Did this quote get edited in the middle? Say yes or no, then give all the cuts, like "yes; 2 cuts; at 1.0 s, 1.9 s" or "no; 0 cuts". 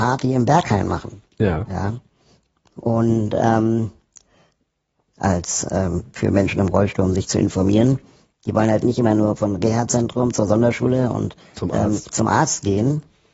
yes; 2 cuts; at 5.1 s, 8.4 s